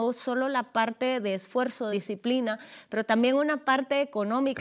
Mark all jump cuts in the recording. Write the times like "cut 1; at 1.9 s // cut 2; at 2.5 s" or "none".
cut 1; at 1.9 s